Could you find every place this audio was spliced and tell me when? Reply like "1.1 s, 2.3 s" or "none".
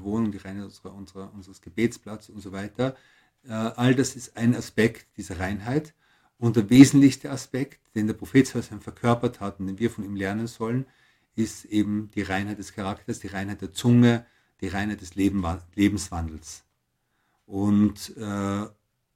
none

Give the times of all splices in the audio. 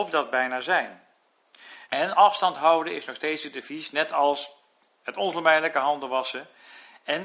1.9 s

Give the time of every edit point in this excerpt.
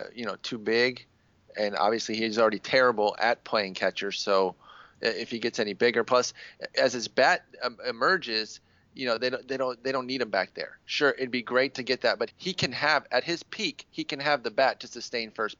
12.3 s

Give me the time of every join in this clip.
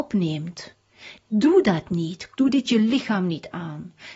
2.3 s

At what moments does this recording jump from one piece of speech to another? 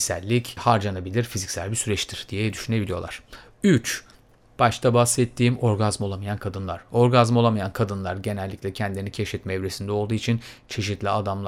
none

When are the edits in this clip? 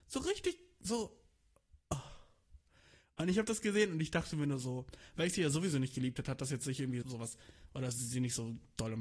7.0 s

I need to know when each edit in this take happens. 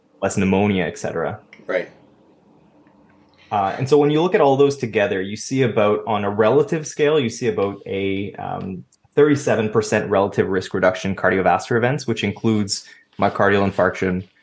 none

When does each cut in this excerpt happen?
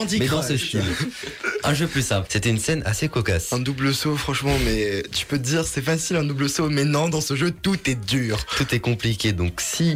2.3 s

